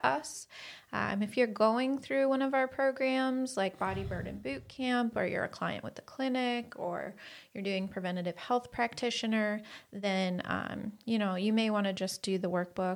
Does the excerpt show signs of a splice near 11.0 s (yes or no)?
no